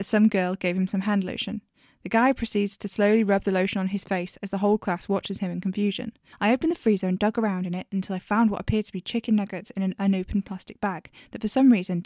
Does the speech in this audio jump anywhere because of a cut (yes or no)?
yes